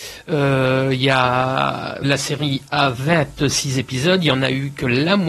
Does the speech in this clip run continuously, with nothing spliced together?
no; 1 cut; at 2.0 s

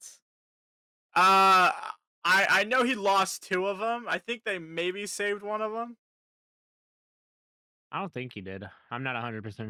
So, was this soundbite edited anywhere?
yes; 1 cut; at 1.1 s

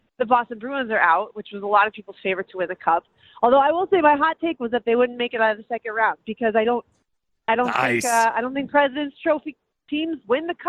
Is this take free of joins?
yes; 0 cuts

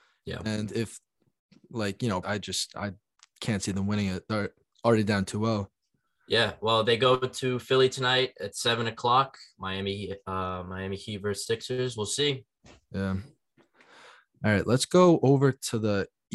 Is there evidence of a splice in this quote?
yes; 1 cut; at 2.2 s

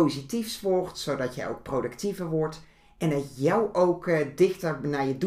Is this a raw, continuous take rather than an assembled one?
yes; 0 cuts

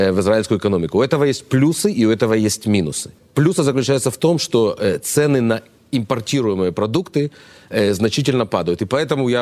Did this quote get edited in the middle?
no; 0 cuts

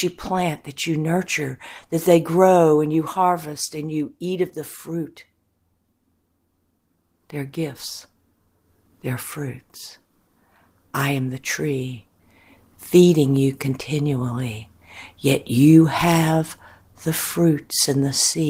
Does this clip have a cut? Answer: no; 0 cuts

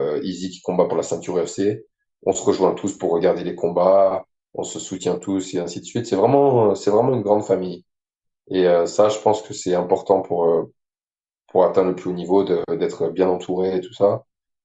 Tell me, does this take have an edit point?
no; 0 cuts

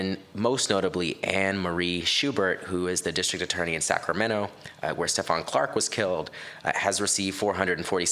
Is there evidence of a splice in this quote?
no; 0 cuts

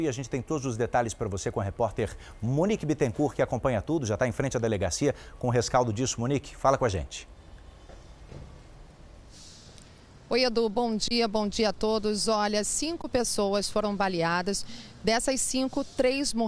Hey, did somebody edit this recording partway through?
no; 0 cuts

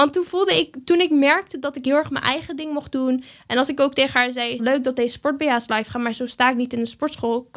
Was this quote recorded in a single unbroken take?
no; 1 cut; at 4.6 s

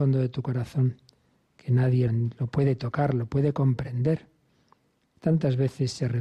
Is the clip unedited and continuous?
no; 2 cuts; at 2.1 s, 5.2 s

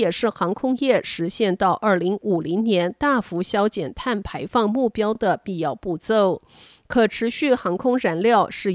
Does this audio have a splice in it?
no; 0 cuts

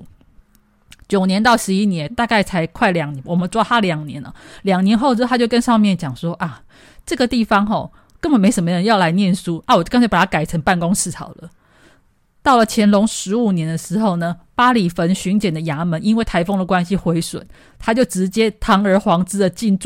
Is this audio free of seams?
yes; 0 cuts

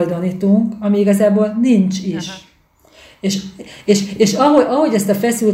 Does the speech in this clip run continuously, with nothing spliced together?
yes; 0 cuts

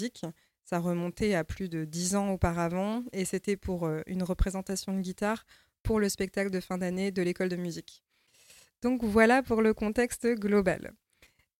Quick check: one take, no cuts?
yes; 0 cuts

